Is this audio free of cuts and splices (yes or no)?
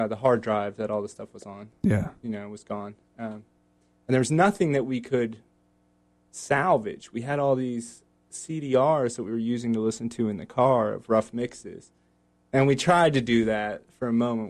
yes